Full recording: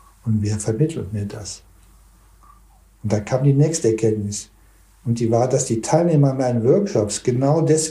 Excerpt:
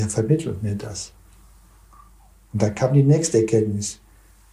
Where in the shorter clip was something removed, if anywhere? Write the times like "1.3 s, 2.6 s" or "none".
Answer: none